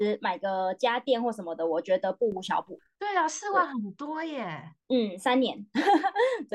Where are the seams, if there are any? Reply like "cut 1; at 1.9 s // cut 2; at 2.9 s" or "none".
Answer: none